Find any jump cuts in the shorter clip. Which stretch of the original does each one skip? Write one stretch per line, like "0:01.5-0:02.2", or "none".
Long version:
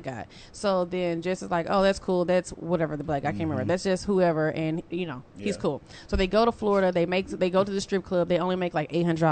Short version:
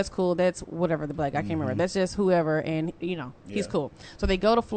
none